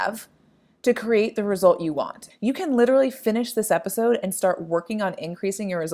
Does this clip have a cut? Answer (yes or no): yes